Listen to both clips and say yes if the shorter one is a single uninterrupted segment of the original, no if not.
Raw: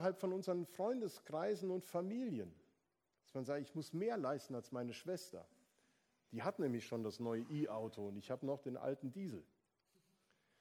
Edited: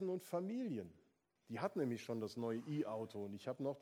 no